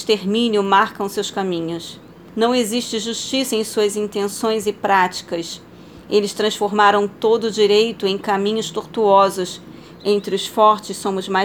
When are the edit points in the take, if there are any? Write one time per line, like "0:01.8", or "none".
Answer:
0:02.3
0:09.9